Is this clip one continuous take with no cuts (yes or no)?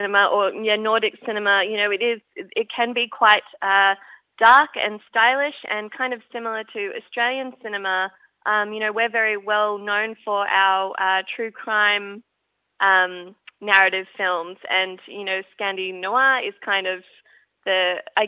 yes